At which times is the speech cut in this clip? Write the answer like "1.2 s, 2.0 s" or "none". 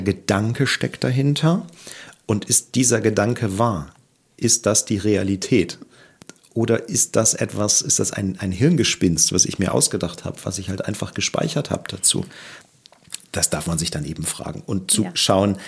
none